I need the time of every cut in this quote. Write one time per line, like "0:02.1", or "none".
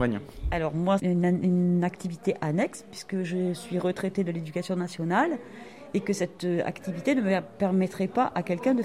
0:01.0